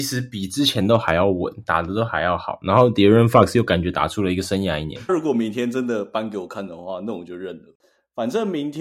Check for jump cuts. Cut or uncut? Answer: cut